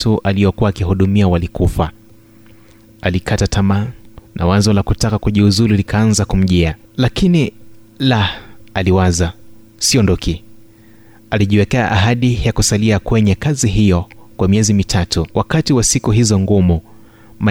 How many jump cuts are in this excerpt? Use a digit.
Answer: 2